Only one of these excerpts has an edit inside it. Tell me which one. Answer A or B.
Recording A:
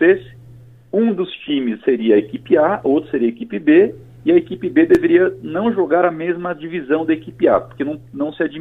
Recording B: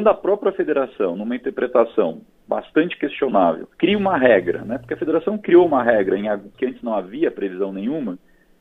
B